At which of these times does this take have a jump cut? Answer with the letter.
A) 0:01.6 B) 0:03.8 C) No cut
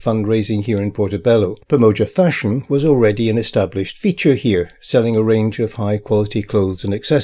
A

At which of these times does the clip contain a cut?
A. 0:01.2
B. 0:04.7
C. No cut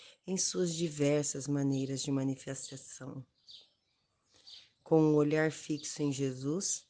C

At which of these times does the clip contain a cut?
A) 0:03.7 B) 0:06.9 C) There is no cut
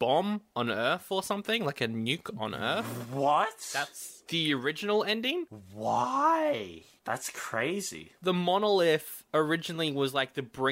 C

